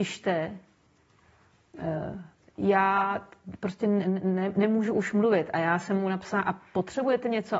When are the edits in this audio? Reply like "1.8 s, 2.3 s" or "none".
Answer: none

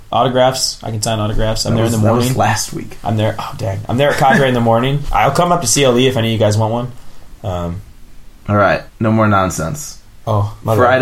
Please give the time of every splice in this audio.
8.9 s

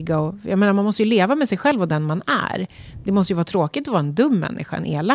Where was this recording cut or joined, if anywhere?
none

